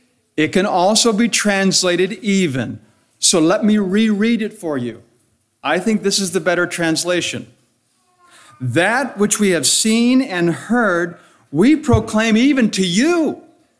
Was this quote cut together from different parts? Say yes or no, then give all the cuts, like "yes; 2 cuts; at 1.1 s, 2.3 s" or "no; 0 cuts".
no; 0 cuts